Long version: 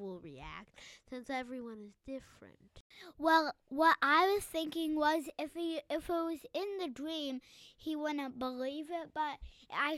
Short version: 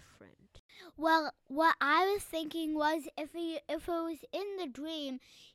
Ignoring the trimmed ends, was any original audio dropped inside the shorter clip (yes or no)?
no